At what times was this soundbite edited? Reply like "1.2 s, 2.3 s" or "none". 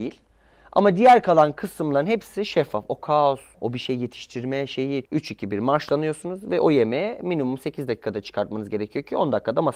3.5 s, 5.0 s